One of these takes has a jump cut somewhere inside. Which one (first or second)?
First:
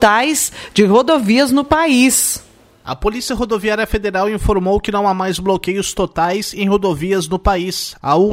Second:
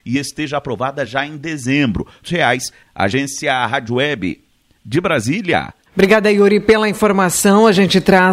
second